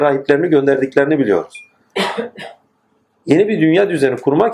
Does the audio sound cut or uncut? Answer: uncut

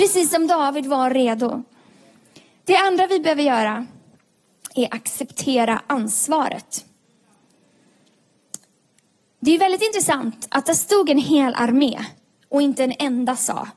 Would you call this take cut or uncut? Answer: uncut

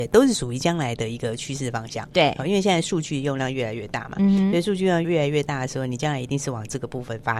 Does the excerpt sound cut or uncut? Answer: cut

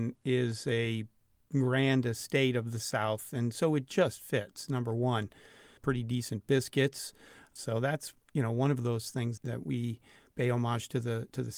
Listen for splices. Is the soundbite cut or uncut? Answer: cut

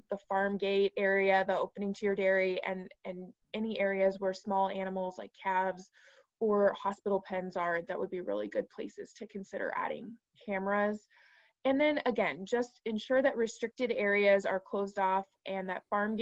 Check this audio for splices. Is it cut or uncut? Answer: uncut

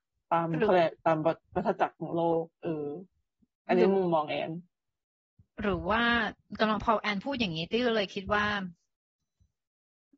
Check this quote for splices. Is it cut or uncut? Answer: uncut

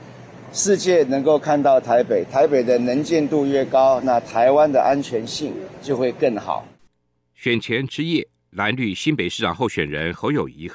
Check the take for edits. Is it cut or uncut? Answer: uncut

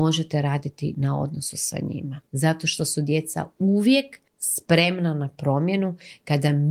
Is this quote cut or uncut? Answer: cut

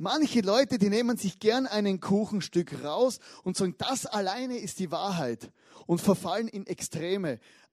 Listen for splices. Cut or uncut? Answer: uncut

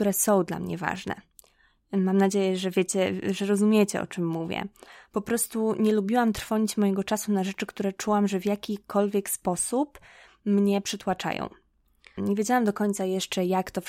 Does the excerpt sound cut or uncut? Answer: cut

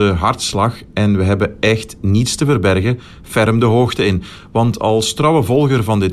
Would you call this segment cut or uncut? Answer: uncut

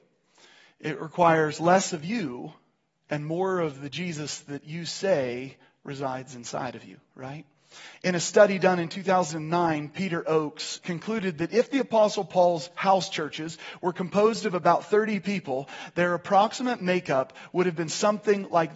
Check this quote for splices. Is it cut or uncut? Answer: cut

